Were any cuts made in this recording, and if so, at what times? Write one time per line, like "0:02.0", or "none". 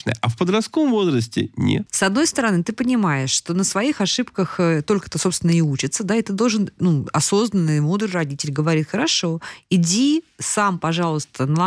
0:01.9